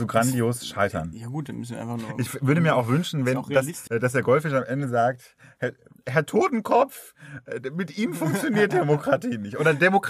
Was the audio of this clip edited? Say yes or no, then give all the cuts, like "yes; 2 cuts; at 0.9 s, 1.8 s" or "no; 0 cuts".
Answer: yes; 1 cut; at 3.9 s